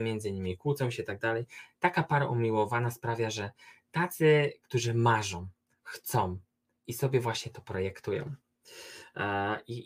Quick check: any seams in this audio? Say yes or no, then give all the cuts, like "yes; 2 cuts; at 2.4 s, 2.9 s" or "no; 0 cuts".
no; 0 cuts